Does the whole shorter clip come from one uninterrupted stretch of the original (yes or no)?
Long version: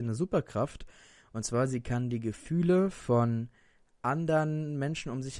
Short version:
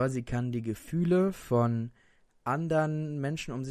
yes